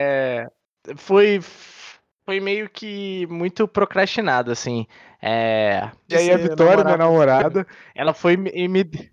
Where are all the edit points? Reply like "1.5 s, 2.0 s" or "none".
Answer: 6.1 s